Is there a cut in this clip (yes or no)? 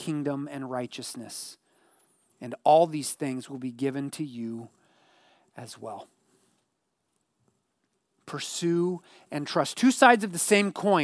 yes